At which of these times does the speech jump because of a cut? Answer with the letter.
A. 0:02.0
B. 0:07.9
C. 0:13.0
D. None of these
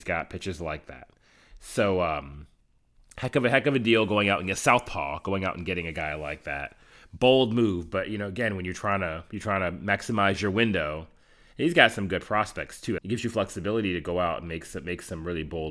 C